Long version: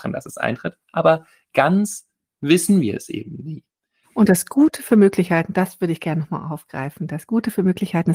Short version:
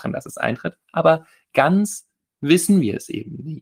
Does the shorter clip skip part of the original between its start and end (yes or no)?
no